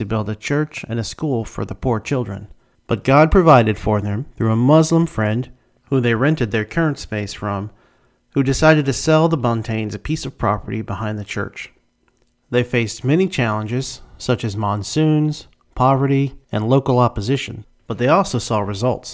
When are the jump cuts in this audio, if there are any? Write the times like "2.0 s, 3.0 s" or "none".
2.7 s, 12.4 s, 16.4 s